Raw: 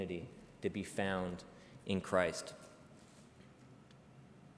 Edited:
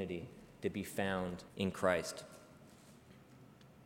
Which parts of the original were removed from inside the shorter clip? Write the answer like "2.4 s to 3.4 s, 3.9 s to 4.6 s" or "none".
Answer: 1.5 s to 1.8 s